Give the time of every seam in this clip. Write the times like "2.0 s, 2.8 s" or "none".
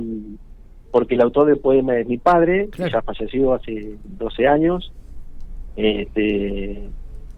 none